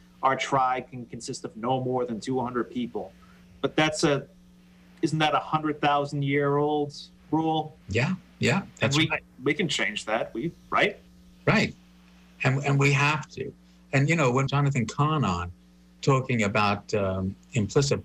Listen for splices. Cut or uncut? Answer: cut